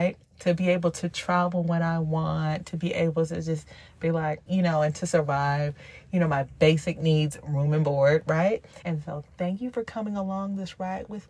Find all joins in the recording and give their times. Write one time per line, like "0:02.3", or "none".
0:04.5
0:08.8